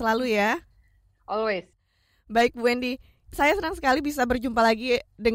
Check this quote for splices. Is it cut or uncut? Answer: uncut